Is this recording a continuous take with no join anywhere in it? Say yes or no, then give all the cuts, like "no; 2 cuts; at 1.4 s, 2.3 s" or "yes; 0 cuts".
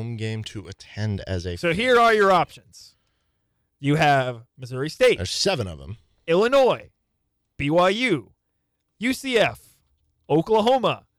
yes; 0 cuts